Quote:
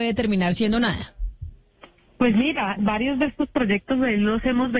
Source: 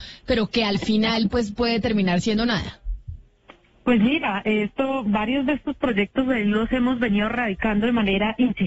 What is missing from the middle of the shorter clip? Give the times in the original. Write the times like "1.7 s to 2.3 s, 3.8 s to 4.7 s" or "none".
4.4 s to 5.0 s